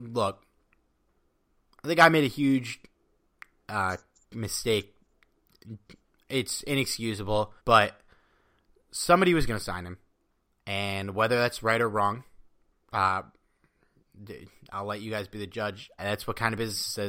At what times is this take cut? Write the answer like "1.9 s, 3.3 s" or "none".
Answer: 7.6 s, 16.0 s